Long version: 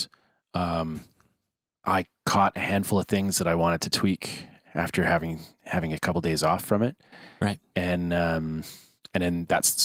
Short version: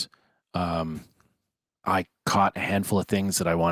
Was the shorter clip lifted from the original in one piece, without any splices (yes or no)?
yes